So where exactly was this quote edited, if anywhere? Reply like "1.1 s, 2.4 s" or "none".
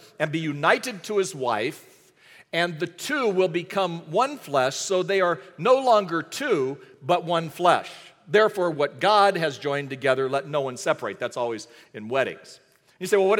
none

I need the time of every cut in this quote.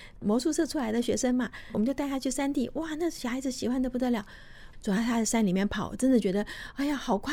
1.7 s, 4.7 s

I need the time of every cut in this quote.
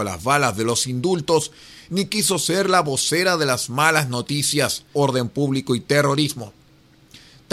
4.9 s

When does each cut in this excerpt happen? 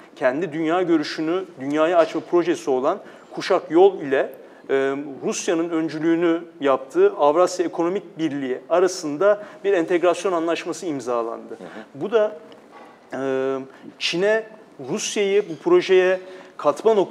none

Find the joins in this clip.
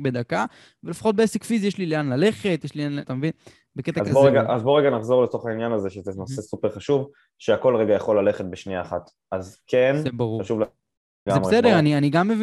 3.0 s, 11.3 s

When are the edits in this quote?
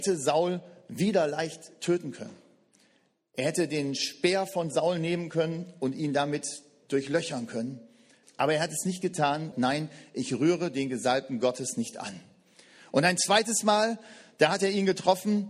8.2 s, 9.5 s

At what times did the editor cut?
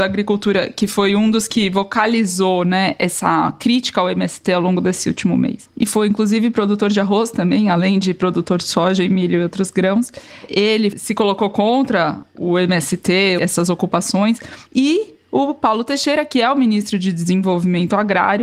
14.7 s

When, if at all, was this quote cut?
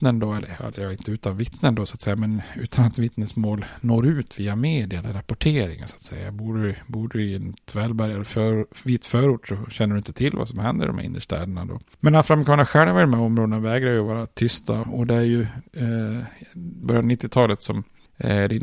14.8 s, 16.8 s

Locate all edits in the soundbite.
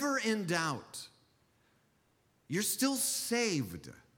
none

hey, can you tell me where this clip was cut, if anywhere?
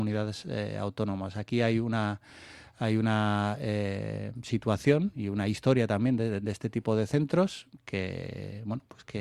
none

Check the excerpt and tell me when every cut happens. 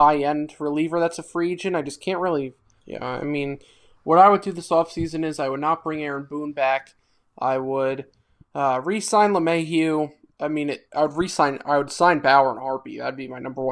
2.8 s, 10.9 s

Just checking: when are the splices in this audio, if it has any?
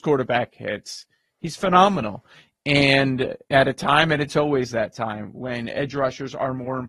none

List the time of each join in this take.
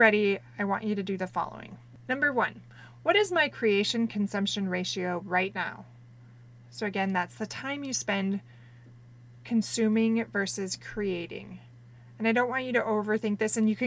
none

